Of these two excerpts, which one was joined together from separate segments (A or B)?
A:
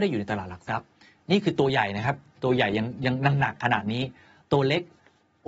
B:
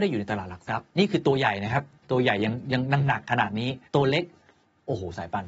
B